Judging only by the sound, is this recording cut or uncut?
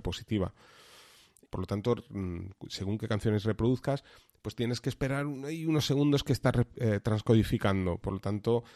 cut